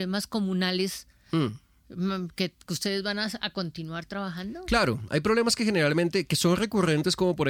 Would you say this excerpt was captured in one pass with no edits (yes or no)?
yes